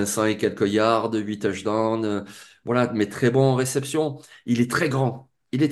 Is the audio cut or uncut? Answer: uncut